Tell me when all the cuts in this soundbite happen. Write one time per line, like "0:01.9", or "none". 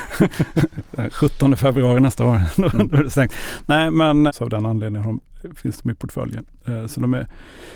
0:04.3

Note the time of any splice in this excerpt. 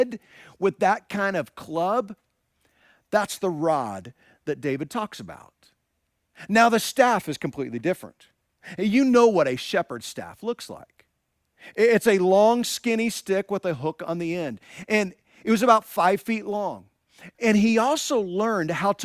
0:17.3

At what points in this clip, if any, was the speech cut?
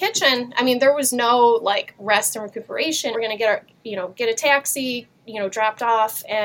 0:03.1
0:05.1

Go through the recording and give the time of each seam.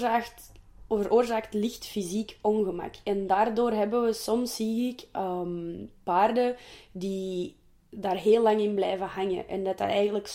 none

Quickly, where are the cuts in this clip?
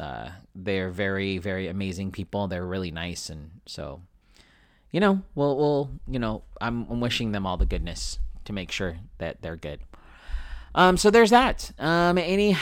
none

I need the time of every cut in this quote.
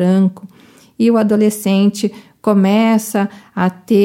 none

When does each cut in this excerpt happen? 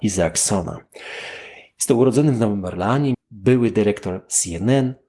0:03.1

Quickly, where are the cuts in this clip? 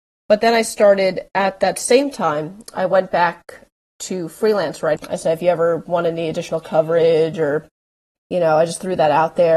0:05.0

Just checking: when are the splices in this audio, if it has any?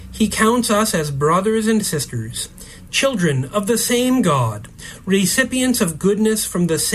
0:02.9

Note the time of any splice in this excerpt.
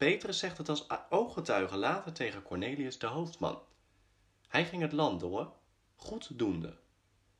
none

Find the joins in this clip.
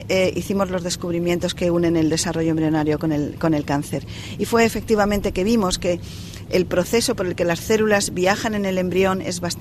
none

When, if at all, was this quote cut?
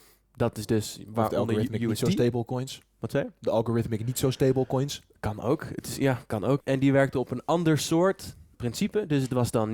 0:06.6
0:08.5

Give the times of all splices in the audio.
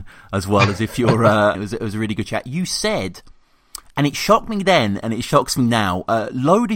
0:01.5

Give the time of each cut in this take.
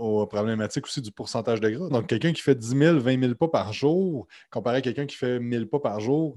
0:01.9

